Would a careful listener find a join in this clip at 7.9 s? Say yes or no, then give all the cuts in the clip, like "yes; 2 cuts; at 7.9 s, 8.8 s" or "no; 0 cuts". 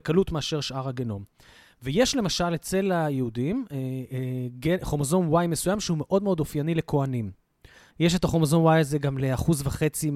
yes; 1 cut; at 7.9 s